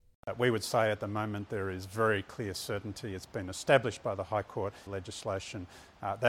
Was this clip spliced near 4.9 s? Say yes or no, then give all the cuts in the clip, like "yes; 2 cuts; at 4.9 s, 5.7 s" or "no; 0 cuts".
yes; 1 cut; at 4.9 s